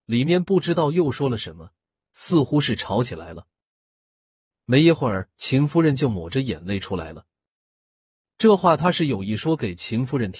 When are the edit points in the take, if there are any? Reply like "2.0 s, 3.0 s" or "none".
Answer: 8.2 s